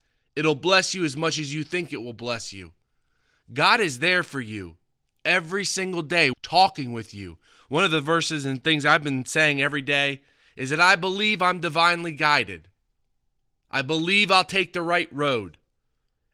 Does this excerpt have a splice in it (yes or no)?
yes